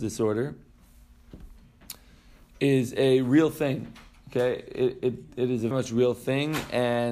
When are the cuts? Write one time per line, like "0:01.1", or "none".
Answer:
0:05.7